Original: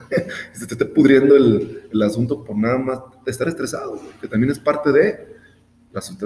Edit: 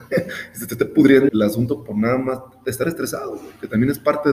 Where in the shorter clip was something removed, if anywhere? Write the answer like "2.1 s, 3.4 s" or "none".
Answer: 1.3 s